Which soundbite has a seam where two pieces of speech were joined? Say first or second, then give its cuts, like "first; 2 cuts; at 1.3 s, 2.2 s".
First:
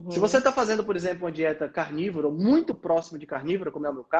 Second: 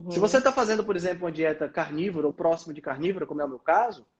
second; 1 cut; at 2.3 s